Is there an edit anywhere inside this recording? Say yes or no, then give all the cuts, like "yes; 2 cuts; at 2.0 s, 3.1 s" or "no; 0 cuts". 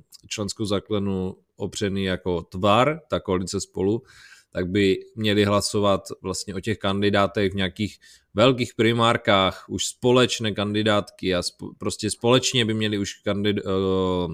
no; 0 cuts